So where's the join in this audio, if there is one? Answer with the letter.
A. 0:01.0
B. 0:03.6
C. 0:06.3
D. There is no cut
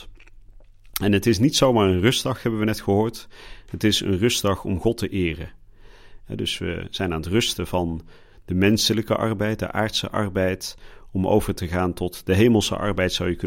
C